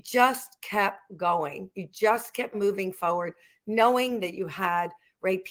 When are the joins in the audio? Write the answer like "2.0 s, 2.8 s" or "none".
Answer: none